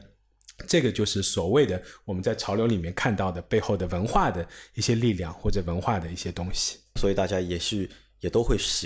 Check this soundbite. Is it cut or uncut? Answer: cut